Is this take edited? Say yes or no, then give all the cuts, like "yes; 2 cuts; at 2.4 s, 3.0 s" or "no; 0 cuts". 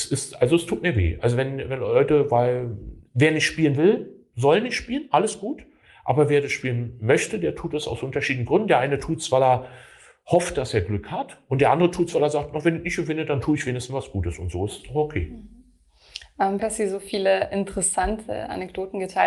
yes; 1 cut; at 16.6 s